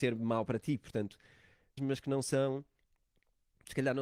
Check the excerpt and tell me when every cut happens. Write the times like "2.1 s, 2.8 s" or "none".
1.8 s